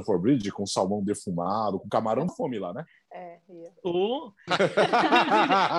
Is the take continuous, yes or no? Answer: no